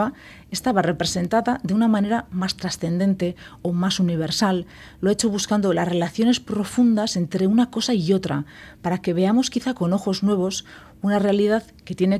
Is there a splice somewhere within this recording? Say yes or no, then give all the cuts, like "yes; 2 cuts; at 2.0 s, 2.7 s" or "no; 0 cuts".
no; 0 cuts